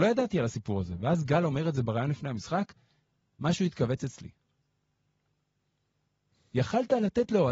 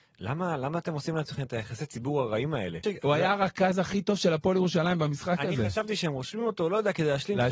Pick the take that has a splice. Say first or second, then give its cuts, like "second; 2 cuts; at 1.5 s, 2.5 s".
second; 1 cut; at 2.8 s